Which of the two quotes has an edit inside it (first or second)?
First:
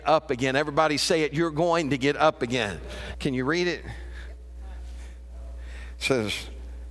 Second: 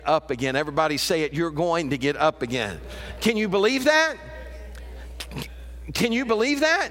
first